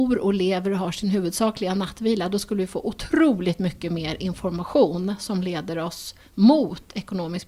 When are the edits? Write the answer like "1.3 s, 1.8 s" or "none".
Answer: none